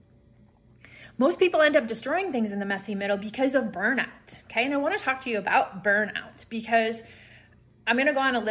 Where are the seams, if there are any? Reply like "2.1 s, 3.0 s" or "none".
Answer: none